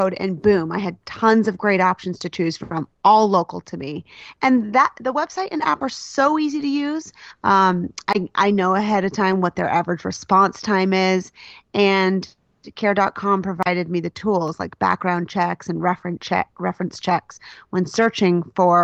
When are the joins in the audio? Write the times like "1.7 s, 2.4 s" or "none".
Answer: 7.4 s